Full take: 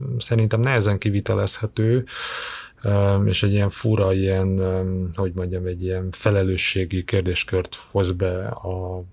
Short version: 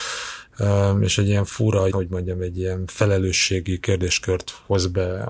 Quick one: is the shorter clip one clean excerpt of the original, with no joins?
no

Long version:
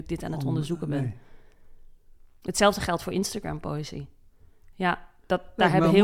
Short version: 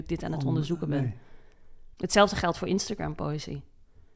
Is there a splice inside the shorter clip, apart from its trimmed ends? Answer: yes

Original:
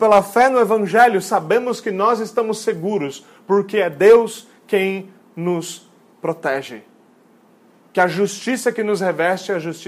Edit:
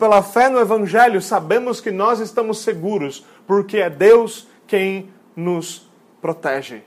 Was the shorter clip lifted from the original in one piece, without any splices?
yes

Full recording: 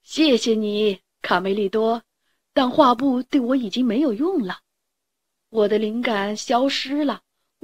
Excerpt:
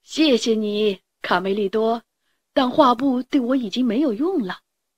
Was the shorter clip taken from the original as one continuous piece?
yes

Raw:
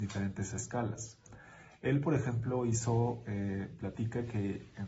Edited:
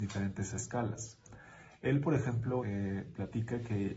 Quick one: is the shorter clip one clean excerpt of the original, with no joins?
no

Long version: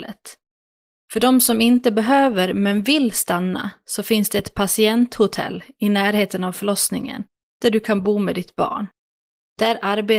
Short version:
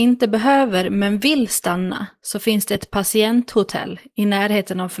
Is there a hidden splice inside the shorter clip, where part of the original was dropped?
no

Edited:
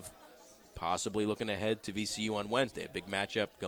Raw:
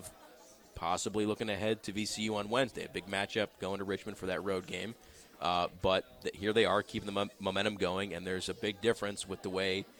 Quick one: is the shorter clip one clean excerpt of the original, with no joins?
yes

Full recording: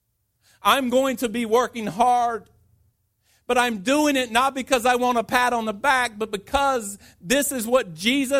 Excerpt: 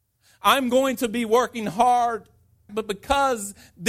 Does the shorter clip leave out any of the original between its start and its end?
yes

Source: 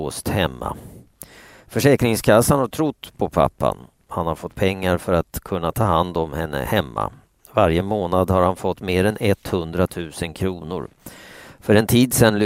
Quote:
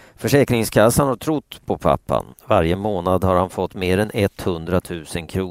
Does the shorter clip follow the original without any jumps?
no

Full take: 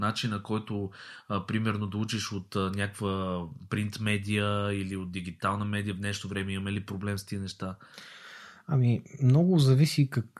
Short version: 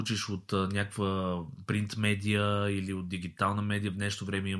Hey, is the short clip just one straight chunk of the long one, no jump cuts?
yes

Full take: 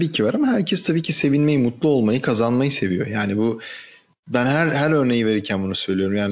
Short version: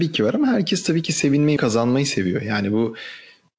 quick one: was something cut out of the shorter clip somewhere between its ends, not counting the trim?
yes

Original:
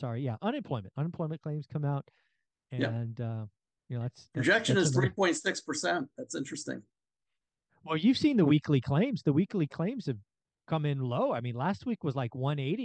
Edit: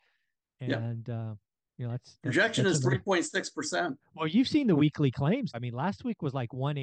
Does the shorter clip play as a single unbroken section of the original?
no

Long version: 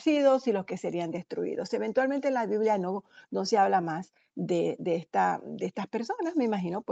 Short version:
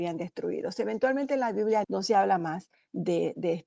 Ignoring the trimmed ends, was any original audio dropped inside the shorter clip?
yes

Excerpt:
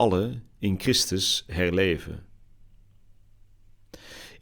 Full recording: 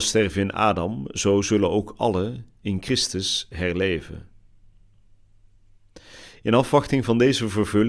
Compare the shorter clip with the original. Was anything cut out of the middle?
no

